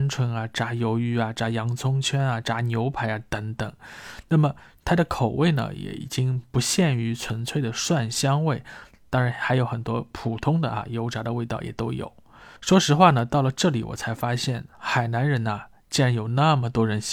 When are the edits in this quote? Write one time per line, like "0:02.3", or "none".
0:12.6